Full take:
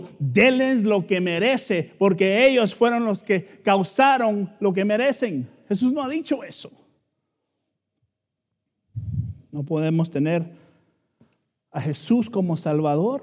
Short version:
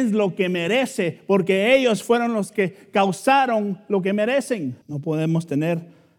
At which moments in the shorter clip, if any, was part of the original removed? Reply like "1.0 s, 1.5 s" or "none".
4.8 s